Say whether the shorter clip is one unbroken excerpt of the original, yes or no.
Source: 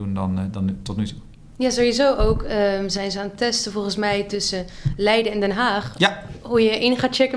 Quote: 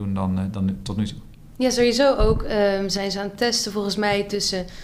yes